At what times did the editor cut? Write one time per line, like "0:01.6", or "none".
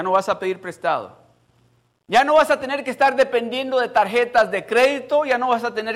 0:02.0

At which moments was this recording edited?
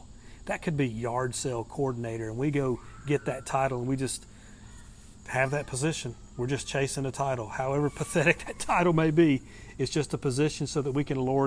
none

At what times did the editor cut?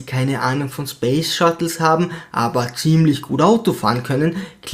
none

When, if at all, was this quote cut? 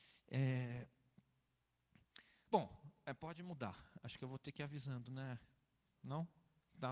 none

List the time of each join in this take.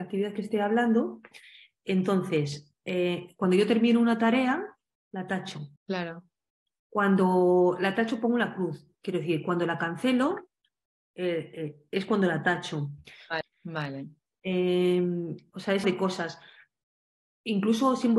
0:05.8
0:13.4
0:15.8

